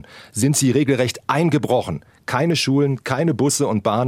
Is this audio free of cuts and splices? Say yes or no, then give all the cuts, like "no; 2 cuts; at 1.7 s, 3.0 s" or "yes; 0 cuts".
yes; 0 cuts